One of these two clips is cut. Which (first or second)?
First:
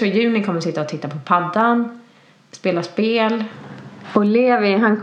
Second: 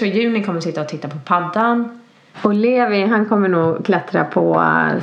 second